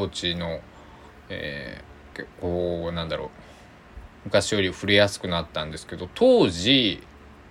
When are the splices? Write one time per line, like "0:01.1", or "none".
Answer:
0:02.1
0:04.2